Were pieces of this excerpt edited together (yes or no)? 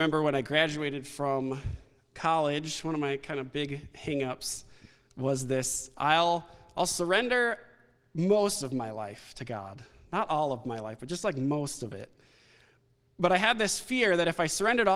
no